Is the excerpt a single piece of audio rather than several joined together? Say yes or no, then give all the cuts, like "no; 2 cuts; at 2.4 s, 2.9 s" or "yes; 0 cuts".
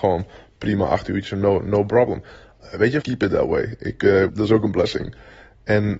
no; 2 cuts; at 3.0 s, 4.3 s